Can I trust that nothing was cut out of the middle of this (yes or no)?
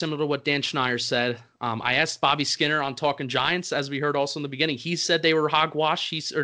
yes